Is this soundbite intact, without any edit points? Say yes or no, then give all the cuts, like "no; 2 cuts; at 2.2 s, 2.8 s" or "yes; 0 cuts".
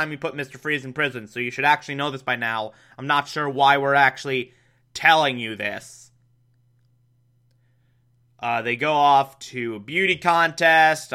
yes; 0 cuts